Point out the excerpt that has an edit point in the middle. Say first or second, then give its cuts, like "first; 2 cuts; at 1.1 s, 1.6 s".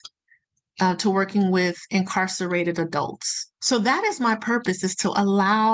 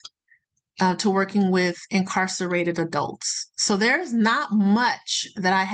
first; 1 cut; at 3.5 s